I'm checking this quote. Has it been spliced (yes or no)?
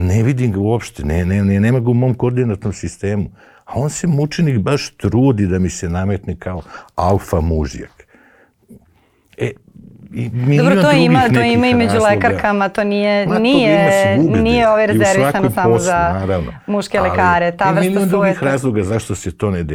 no